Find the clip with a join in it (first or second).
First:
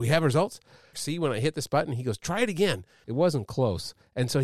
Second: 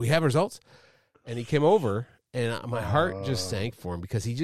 first